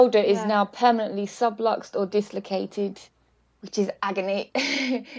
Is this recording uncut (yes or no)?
yes